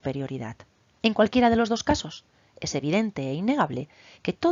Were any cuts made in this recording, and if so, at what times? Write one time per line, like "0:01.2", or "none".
0:01.0